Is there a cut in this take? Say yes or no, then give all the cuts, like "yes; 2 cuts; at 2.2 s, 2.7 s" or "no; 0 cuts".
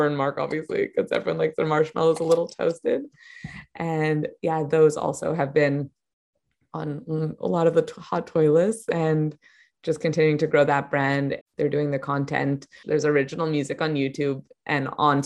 yes; 2 cuts; at 11.4 s, 12.8 s